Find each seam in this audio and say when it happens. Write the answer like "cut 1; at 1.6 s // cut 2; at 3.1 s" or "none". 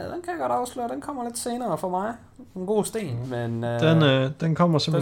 cut 1; at 3.2 s

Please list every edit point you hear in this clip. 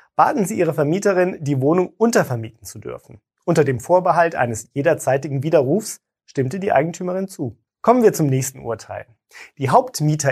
cut 1; at 7.7 s

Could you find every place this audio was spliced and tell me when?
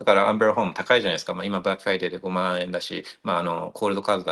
none

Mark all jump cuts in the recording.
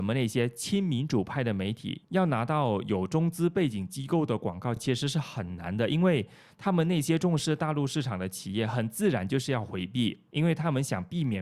none

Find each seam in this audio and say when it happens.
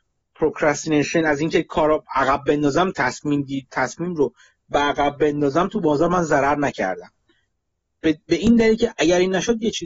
cut 1; at 2.9 s

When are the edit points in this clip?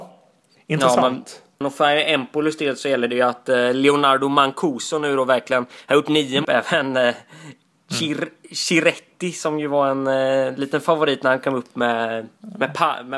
cut 1; at 1.6 s // cut 2; at 6.4 s

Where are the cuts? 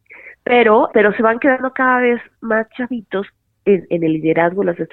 cut 1; at 0.9 s // cut 2; at 3.9 s

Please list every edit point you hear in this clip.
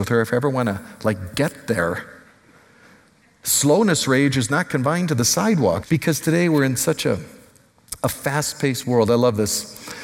cut 1; at 5.8 s

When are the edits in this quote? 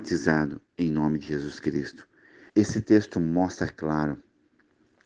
cut 1; at 2.5 s

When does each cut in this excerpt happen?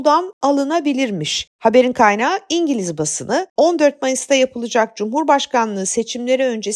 none

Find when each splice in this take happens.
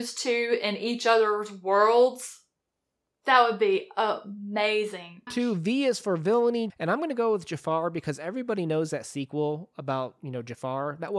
cut 1; at 5.3 s // cut 2; at 6.7 s

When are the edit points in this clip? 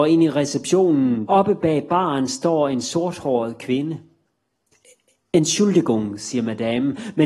cut 1; at 1.3 s

